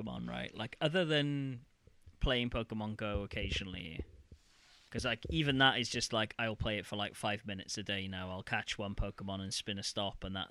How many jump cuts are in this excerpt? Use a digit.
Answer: 0